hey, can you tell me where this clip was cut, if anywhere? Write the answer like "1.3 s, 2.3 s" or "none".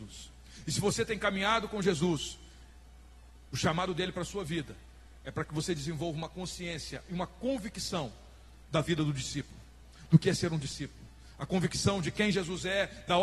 none